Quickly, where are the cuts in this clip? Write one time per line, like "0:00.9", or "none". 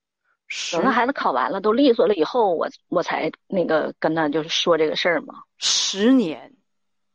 none